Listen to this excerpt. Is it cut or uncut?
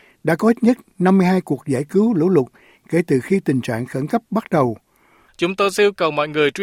cut